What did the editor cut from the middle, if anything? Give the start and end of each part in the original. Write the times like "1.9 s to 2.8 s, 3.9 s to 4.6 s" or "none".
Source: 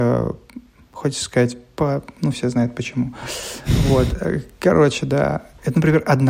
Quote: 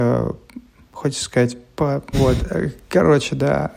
2.1 s to 3.8 s